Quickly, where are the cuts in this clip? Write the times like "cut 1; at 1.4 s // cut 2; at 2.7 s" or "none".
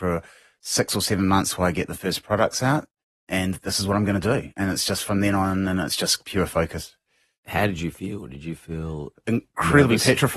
none

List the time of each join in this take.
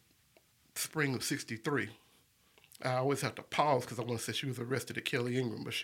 none

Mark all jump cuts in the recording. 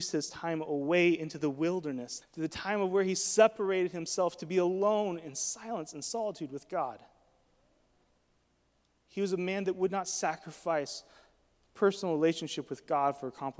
cut 1; at 2.2 s

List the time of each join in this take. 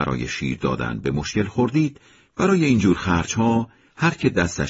cut 1; at 2.3 s

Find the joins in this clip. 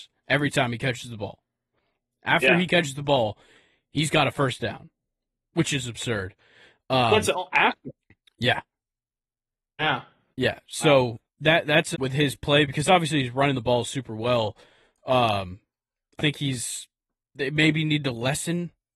cut 1; at 11.9 s // cut 2; at 16.2 s

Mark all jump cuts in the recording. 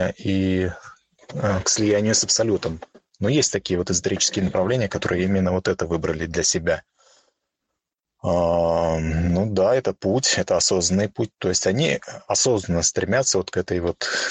none

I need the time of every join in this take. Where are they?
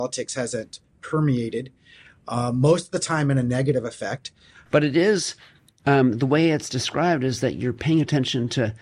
cut 1; at 4.7 s

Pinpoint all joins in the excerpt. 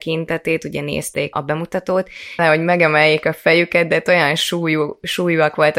cut 1; at 1.3 s // cut 2; at 2.4 s

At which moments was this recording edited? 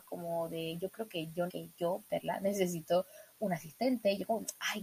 cut 1; at 1.5 s

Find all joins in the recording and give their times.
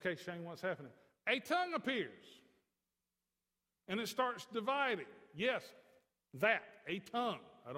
none

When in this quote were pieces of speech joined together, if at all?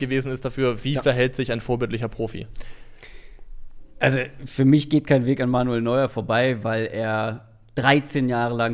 none

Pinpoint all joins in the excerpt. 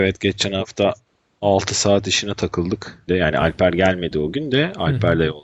cut 1; at 3.1 s

